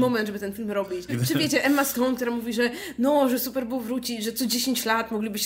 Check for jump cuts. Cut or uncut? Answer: cut